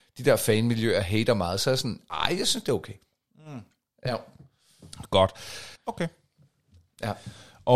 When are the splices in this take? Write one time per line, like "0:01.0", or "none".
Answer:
0:04.1
0:05.8